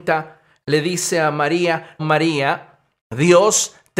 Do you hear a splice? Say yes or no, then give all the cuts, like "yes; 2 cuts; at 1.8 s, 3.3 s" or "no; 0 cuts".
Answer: yes; 1 cut; at 2.0 s